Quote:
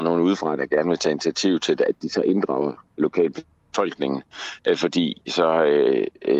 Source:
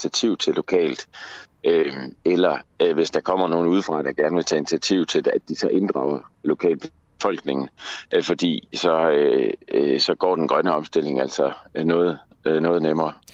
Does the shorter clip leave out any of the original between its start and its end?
no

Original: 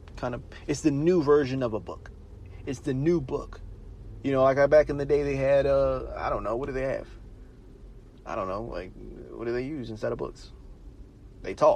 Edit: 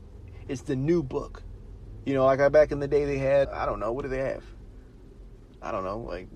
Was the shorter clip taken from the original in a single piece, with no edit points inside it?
no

